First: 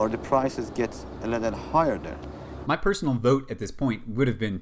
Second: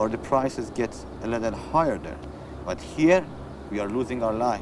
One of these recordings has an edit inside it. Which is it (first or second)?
first